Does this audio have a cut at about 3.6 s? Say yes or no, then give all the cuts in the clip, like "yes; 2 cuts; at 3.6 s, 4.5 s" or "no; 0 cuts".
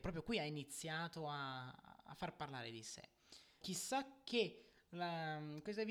yes; 1 cut; at 3.6 s